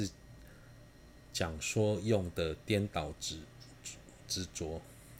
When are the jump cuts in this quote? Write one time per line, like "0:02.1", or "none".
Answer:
none